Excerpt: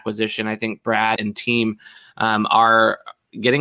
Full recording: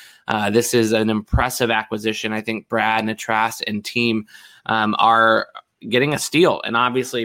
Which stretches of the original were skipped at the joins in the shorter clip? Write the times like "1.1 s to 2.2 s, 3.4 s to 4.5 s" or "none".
3.0 s to 3.6 s